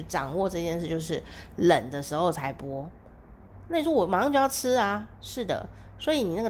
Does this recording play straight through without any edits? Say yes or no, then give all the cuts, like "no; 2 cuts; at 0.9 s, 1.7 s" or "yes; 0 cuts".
yes; 0 cuts